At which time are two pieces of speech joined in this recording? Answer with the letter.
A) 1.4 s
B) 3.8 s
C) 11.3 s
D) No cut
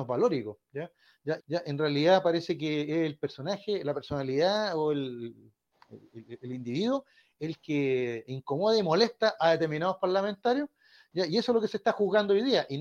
A